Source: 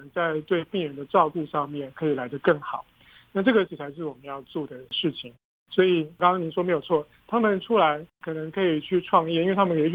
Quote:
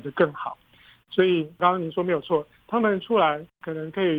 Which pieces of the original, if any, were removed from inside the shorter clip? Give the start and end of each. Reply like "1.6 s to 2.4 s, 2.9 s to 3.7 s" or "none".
3.3 s to 5.6 s